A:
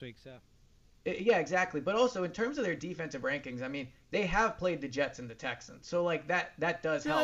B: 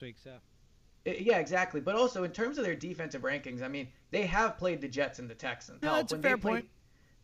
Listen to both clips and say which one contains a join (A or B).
B